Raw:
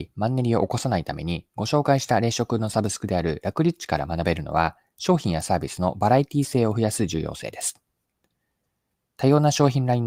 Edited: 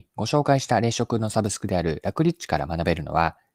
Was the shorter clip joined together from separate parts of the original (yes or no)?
no